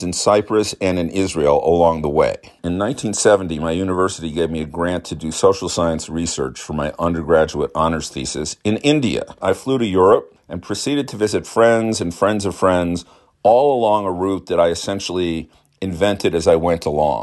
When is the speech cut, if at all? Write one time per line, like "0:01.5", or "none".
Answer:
0:02.6
0:09.4